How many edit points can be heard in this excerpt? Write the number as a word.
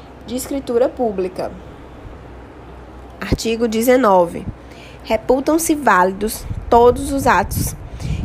zero